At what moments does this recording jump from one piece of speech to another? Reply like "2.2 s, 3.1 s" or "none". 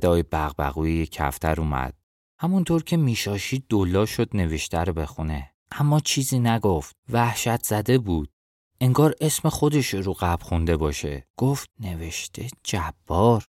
2.2 s